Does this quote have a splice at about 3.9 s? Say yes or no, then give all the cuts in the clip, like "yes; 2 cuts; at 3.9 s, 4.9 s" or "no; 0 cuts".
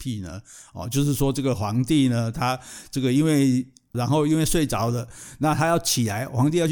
yes; 1 cut; at 3.9 s